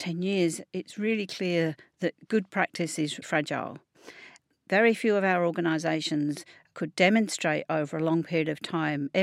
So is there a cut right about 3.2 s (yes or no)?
yes